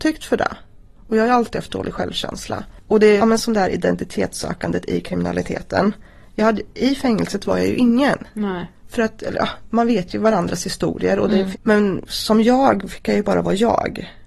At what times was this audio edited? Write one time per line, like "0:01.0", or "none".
0:03.2
0:11.5